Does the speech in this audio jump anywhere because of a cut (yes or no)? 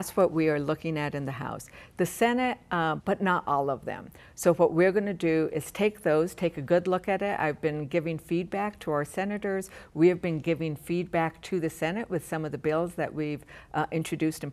yes